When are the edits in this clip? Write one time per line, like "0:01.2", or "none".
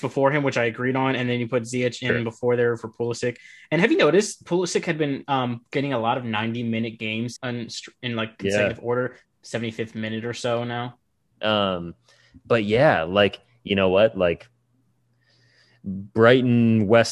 0:07.4
0:09.2
0:11.3